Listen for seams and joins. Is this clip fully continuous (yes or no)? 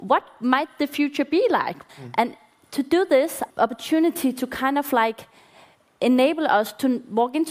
no